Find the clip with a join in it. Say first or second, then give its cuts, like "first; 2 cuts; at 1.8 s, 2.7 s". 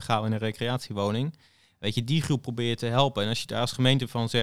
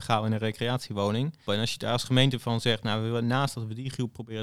second; 1 cut; at 1.5 s